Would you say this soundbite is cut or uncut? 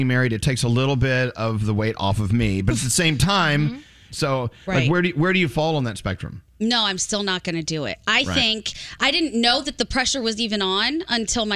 cut